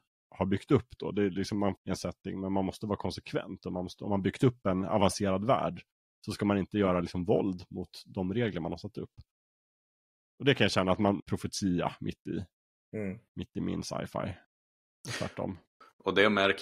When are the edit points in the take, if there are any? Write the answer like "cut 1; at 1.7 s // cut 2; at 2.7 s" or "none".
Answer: cut 1; at 1.8 s // cut 2; at 11.2 s